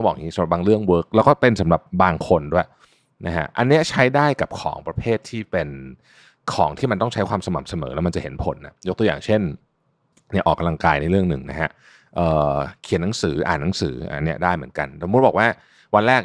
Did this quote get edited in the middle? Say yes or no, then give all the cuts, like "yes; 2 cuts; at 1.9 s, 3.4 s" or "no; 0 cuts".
no; 0 cuts